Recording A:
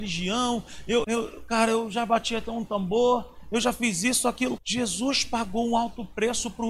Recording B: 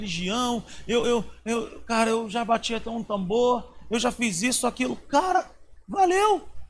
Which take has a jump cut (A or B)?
A